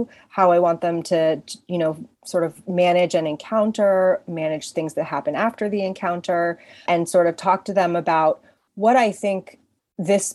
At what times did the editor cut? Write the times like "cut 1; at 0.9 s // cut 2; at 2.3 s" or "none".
cut 1; at 2.1 s // cut 2; at 6.9 s